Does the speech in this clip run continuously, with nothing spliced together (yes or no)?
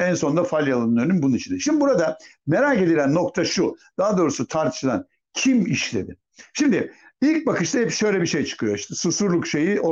yes